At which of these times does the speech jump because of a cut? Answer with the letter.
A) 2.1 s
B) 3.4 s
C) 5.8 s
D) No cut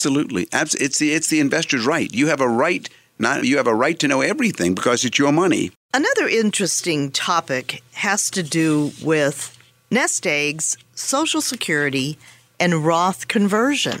B